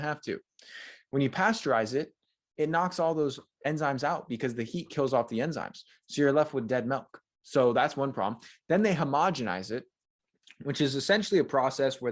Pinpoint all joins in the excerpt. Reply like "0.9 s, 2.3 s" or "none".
none